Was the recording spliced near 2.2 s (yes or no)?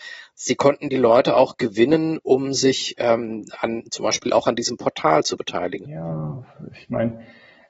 no